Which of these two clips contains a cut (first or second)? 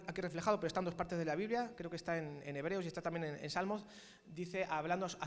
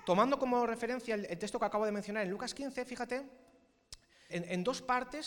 second